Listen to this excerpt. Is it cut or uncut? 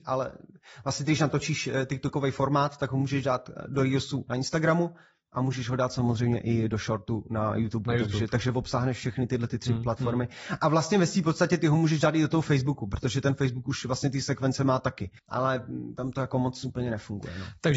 cut